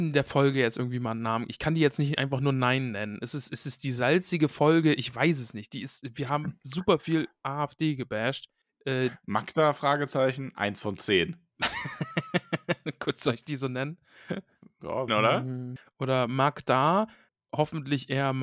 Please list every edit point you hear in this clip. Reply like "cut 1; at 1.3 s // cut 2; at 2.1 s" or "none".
cut 1; at 15.1 s